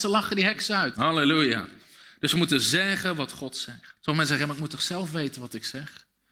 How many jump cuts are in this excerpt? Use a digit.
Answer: 2